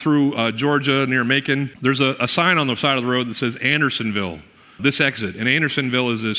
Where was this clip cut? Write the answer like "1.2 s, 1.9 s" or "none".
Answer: 1.7 s, 4.8 s